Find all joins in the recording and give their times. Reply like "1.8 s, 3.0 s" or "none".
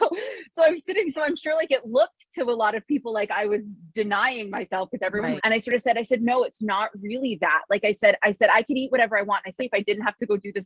5.4 s, 9.6 s